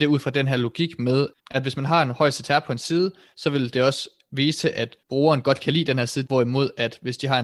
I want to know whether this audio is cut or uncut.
cut